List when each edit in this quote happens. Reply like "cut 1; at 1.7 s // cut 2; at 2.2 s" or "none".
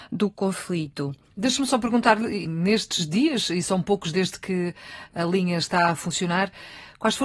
cut 1; at 2.4 s